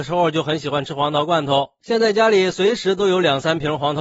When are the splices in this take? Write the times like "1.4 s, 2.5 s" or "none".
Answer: 1.8 s